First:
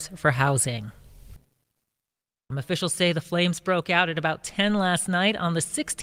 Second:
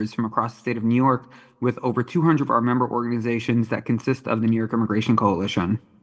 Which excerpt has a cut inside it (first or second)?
first